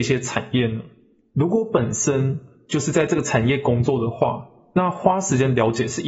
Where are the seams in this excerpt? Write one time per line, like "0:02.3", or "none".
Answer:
none